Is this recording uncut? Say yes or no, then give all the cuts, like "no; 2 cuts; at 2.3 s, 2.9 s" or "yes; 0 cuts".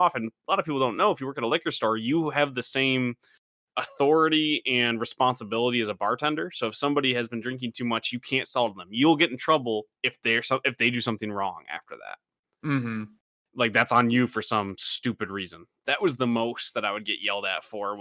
no; 1 cut; at 15.8 s